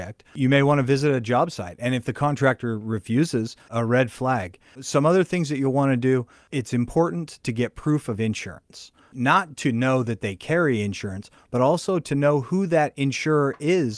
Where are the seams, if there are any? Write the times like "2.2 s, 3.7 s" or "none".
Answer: 3.7 s, 9.5 s